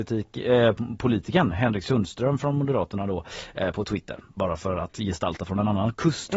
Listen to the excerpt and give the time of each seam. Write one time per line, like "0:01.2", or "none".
none